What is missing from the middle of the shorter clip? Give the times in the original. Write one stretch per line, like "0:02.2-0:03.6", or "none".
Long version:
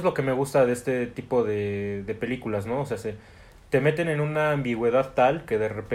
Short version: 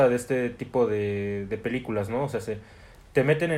none

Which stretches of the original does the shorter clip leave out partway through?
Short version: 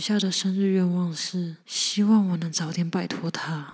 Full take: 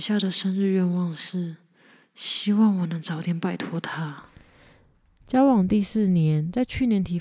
0:01.6-0:02.1

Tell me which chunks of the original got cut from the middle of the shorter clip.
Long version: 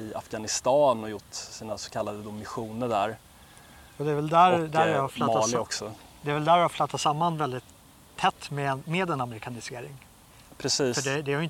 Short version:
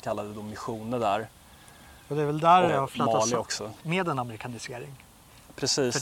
0:04.6-0:04.9
0:06.0-0:08.8

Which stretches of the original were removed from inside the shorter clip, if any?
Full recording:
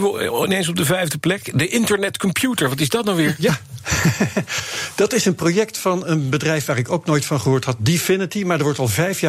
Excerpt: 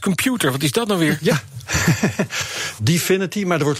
0:04.9-0:07.8

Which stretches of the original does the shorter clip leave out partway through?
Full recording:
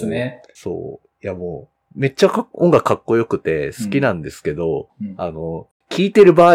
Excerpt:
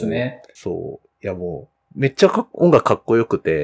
none

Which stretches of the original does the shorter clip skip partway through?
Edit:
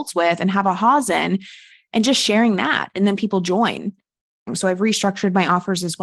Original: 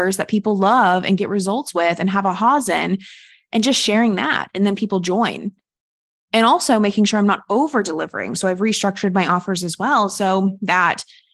0:06.1-0:08.3

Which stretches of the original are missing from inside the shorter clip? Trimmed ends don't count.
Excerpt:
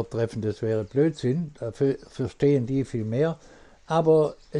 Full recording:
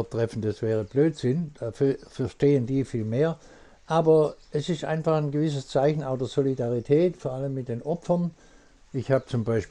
none

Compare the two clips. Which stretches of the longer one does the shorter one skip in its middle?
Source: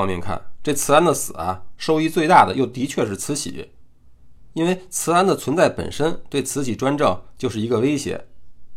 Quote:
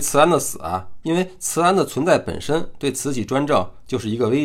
0:01.8-0:04.5

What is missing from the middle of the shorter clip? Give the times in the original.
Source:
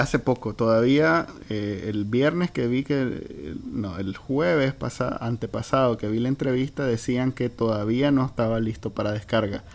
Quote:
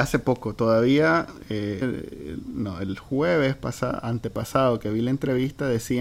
0:01.8-0:03.0

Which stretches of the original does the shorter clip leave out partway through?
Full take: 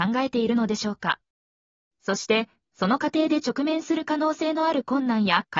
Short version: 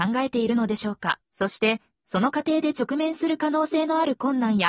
0:01.3-0:01.9

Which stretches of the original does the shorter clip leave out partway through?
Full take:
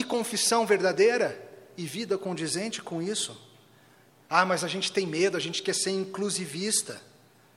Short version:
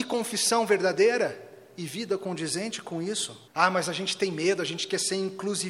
0:03.5-0:04.2

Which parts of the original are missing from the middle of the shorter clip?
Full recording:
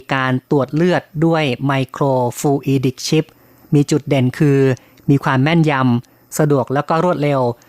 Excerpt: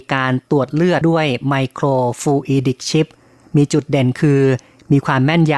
0:01.0-0:01.2

